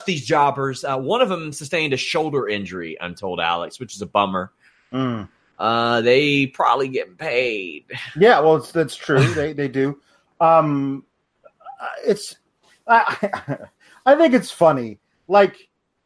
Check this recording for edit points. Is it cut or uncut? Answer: uncut